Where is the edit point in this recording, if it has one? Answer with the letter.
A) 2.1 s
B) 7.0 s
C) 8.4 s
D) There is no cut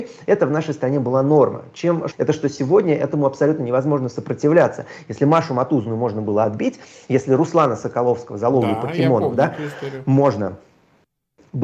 A